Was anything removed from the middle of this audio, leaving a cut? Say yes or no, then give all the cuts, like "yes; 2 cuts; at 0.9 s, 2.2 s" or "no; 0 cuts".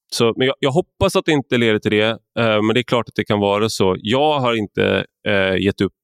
no; 0 cuts